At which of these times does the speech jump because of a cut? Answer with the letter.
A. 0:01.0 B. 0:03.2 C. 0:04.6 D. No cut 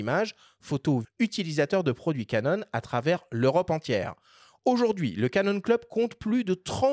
A